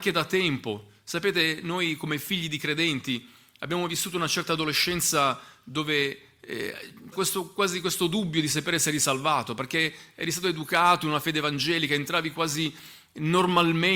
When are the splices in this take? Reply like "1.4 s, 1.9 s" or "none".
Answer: 7.1 s